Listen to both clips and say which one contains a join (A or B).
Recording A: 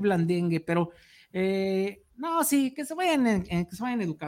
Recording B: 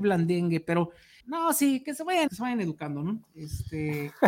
B